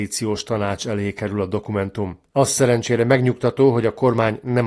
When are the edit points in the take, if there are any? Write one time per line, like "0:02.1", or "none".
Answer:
0:02.3